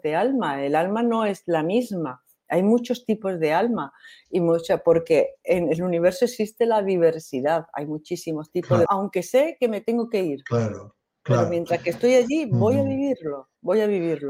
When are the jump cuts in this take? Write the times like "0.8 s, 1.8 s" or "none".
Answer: 8.9 s